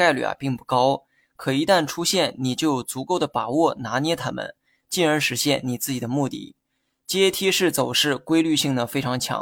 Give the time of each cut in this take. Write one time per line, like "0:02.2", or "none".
none